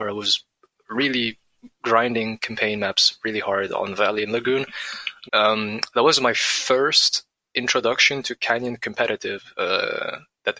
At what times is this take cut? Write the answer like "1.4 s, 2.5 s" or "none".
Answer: 5.3 s

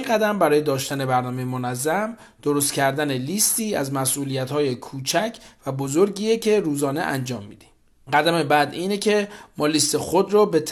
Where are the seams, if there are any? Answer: 8.1 s

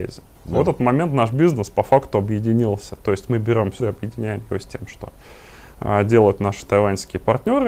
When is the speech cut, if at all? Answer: 3.8 s

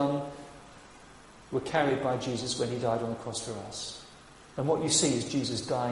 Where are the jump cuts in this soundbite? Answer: 4.4 s

